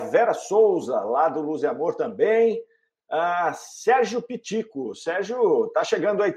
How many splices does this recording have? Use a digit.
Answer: 0